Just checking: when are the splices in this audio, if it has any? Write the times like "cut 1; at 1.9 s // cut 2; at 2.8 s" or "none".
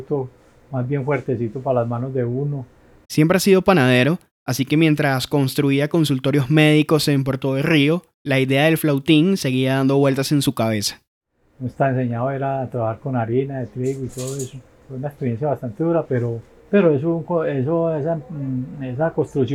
none